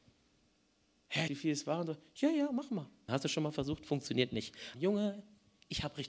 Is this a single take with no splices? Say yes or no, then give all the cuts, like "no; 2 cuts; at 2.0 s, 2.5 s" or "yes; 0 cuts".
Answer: no; 3 cuts; at 1.3 s, 3.1 s, 4.7 s